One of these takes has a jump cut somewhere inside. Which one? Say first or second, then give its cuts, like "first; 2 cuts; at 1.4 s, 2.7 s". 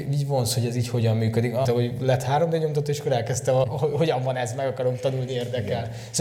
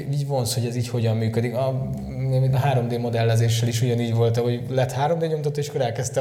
first; 2 cuts; at 1.6 s, 3.6 s